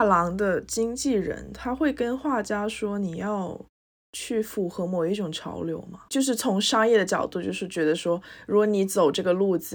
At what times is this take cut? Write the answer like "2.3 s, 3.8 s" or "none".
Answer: none

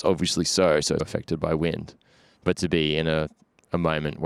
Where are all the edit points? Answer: 1.0 s

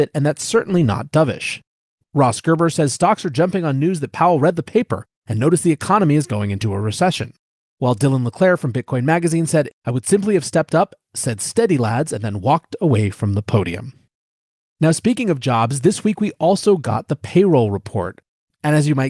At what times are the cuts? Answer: 9.7 s

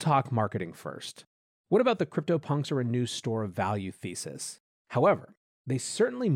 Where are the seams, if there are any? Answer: 1.6 s, 4.7 s

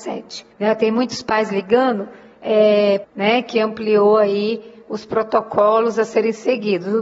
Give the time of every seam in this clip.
3.0 s

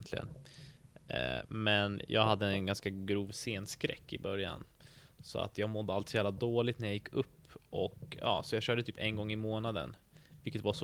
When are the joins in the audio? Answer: none

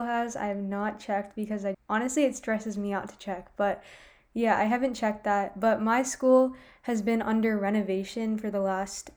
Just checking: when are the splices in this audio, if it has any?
1.7 s

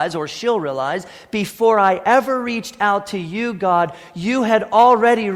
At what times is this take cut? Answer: none

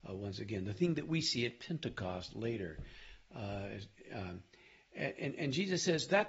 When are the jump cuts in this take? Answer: none

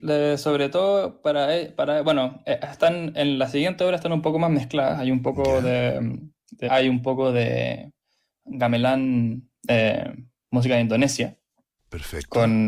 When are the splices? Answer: 6.7 s

